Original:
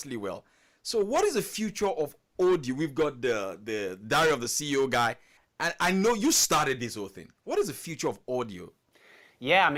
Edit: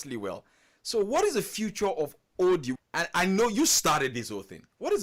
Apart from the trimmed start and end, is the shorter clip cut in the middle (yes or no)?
yes